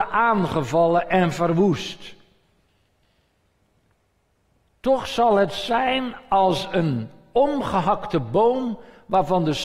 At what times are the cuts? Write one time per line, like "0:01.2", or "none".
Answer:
none